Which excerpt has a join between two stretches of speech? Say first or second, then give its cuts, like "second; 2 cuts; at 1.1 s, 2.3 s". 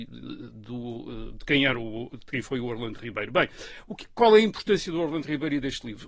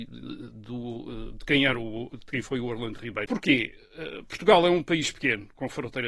second; 1 cut; at 3.3 s